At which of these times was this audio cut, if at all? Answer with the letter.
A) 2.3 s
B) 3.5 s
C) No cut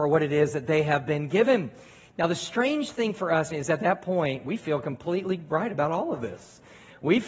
B